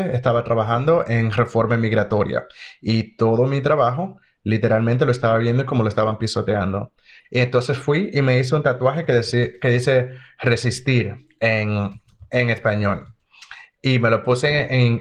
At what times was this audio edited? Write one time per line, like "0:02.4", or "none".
0:07.2